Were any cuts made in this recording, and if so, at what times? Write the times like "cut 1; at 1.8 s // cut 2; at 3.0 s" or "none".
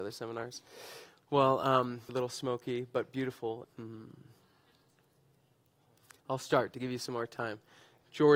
cut 1; at 2.1 s // cut 2; at 3.6 s